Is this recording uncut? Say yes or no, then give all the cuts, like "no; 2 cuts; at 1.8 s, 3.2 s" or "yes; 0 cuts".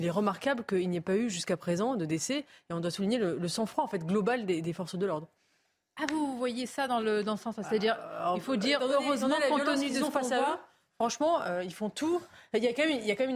yes; 0 cuts